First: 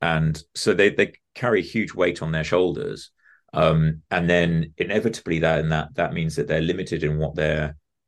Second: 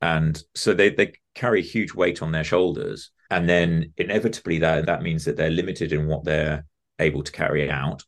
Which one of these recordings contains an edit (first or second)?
second